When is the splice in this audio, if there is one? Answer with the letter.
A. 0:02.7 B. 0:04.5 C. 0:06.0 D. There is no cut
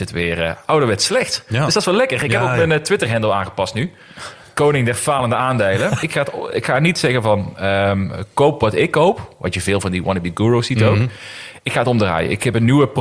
C